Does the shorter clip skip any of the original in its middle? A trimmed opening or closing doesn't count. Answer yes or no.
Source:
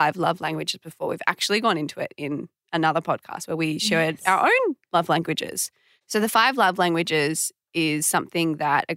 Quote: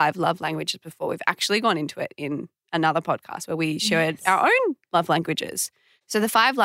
no